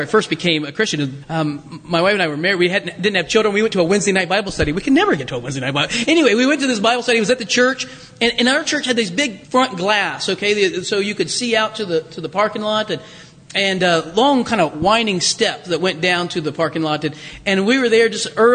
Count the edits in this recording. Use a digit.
2